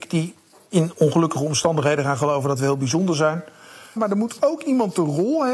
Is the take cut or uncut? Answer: cut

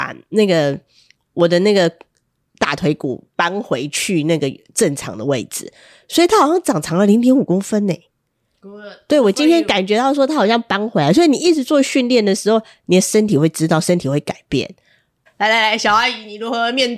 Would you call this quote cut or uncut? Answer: cut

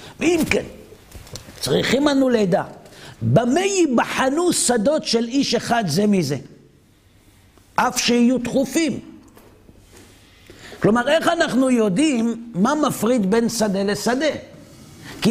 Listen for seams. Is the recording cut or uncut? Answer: uncut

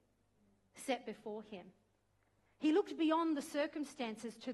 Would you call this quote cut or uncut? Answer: uncut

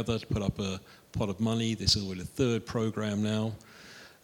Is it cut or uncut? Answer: uncut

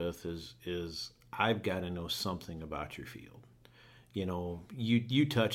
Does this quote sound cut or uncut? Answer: uncut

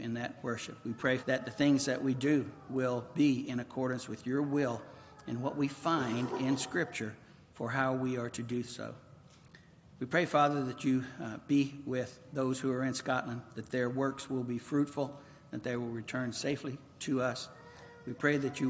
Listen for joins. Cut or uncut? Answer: cut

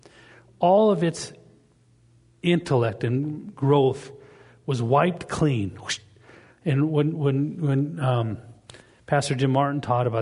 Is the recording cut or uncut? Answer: uncut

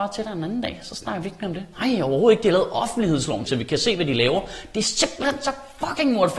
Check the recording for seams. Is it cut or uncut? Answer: cut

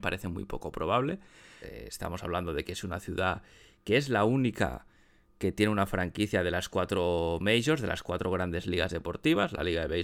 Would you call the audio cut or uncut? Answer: cut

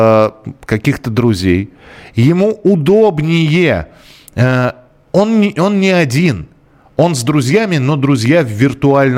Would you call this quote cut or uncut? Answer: uncut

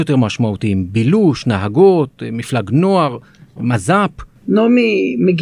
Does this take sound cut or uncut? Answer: cut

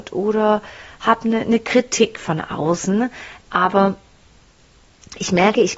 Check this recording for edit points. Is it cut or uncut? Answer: cut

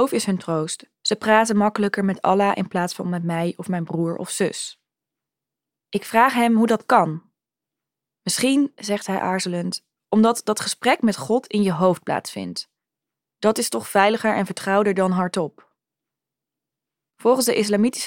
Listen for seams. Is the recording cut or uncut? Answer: uncut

